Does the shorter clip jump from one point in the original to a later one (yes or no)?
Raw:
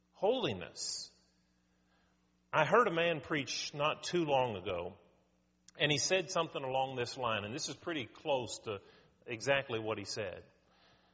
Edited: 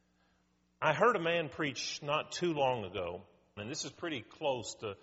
yes